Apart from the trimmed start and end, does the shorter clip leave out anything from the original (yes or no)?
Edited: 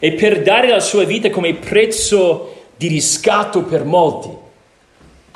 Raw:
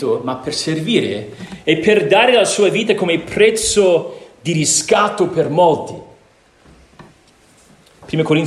no